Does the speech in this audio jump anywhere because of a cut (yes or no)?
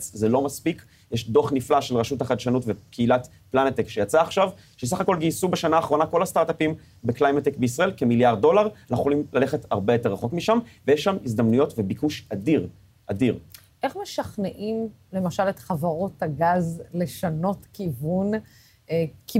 no